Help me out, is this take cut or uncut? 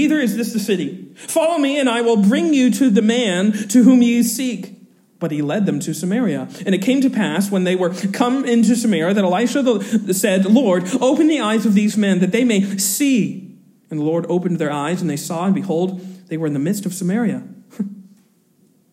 uncut